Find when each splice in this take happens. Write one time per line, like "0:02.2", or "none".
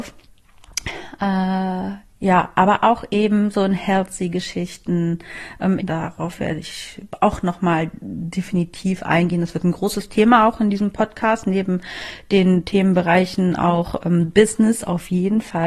0:05.8

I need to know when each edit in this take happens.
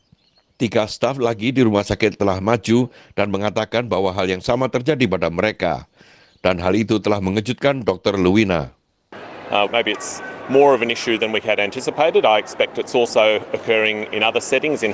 0:09.7

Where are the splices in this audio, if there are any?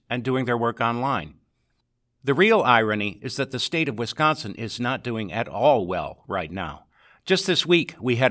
none

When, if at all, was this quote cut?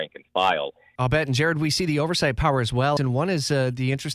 0:01.0
0:03.0

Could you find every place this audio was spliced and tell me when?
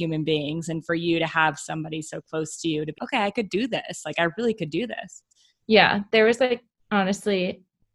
0:03.0

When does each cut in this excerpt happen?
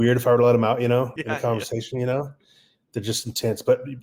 0:01.2

